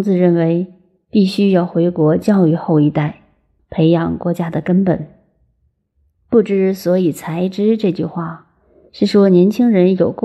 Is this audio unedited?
no; 1 cut; at 3.6 s

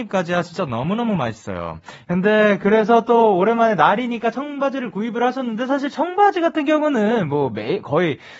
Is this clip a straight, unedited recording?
no; 1 cut; at 2.0 s

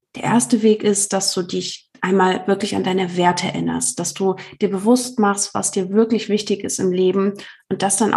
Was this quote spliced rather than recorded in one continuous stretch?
no; 0 cuts

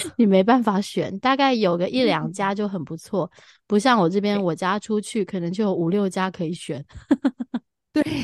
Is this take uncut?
yes; 0 cuts

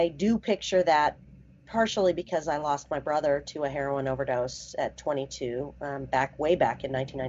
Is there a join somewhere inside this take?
no; 0 cuts

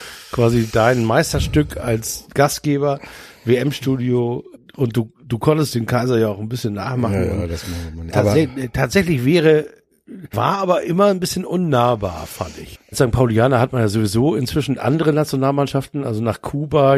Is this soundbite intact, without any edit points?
no; 2 cuts; at 10.3 s, 12.8 s

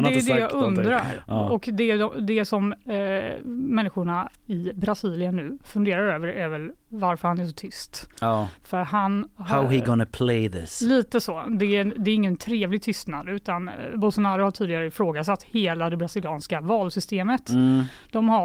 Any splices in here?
no; 0 cuts

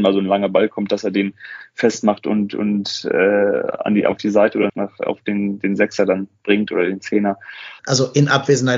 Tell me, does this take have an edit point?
yes; 2 cuts; at 4.7 s, 7.8 s

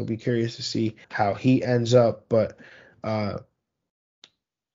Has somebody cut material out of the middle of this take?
yes; 1 cut; at 1.0 s

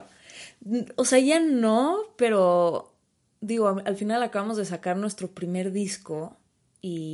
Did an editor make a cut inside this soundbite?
no; 0 cuts

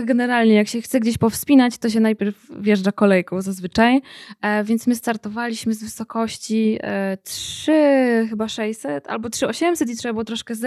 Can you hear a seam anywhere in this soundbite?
no; 0 cuts

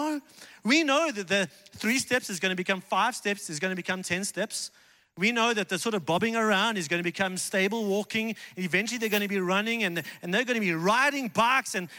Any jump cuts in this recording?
no; 0 cuts

